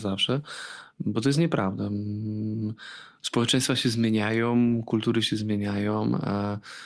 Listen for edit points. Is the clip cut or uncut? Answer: uncut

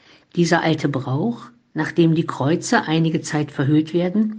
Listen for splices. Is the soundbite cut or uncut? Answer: uncut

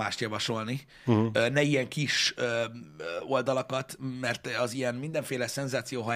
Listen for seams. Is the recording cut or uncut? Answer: uncut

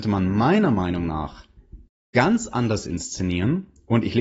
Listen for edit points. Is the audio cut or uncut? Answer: uncut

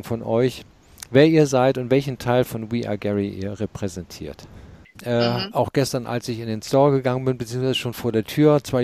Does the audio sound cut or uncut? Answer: cut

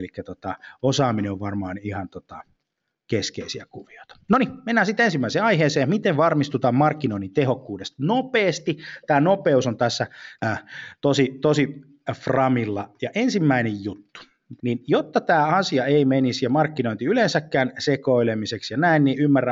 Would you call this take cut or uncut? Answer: cut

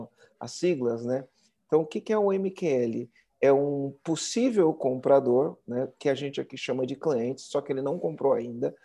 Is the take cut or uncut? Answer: uncut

